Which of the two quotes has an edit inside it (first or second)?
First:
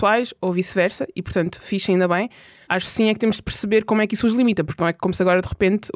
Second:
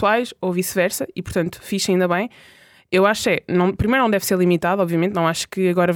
first